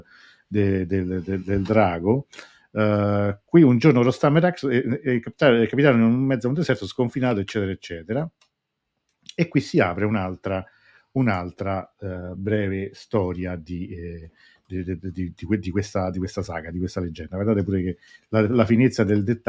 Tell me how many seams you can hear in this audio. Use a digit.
0